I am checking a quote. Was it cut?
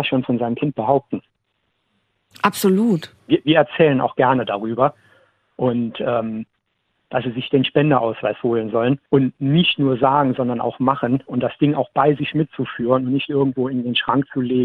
yes; 3 cuts; at 3.2 s, 7.0 s, 9.1 s

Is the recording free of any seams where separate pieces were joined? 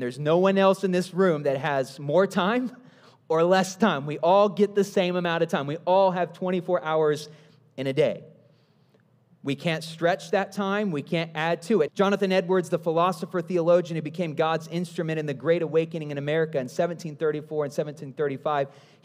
no; 1 cut; at 11.9 s

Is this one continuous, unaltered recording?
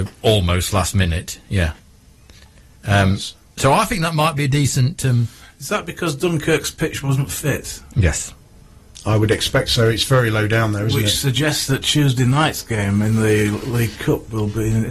yes; 0 cuts

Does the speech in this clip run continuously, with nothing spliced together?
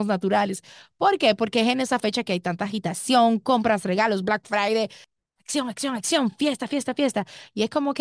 yes; 0 cuts

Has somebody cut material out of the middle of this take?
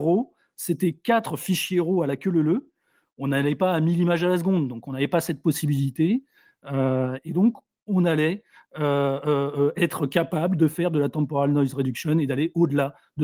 no; 0 cuts

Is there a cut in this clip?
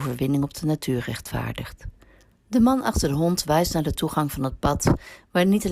yes; 1 cut; at 2.3 s

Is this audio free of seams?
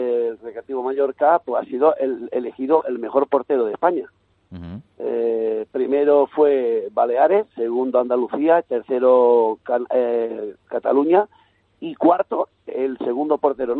yes; 0 cuts

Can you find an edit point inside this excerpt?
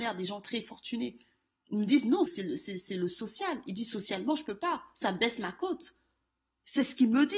yes; 1 cut; at 2.3 s

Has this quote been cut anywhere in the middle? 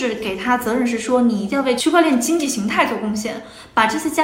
no; 0 cuts

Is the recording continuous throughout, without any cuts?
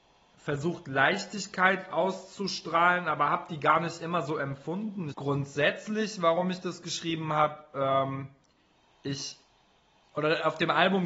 no; 1 cut; at 5.1 s

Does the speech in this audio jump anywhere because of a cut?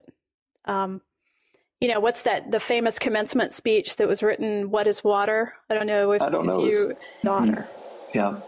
yes; 1 cut; at 7.2 s

